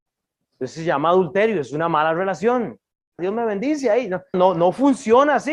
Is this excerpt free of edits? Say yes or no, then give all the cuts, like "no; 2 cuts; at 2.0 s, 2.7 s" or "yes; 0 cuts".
no; 2 cuts; at 3.2 s, 4.3 s